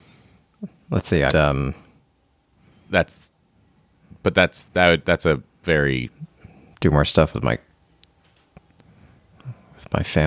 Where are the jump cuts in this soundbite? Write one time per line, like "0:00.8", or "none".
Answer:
0:01.3